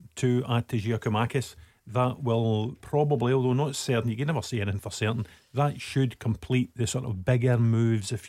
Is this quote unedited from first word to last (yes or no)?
no